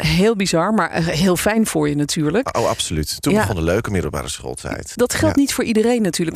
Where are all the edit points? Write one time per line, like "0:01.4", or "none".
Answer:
0:05.0

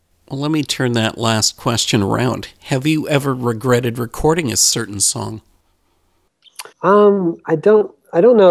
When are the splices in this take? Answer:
0:06.7

